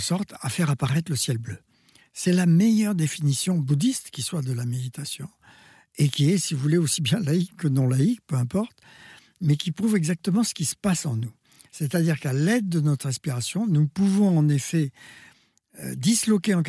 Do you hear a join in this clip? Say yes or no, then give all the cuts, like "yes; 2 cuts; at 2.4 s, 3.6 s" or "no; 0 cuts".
no; 0 cuts